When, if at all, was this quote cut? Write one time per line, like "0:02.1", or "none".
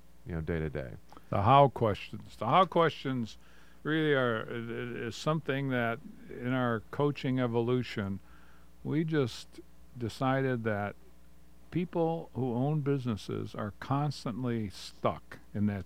none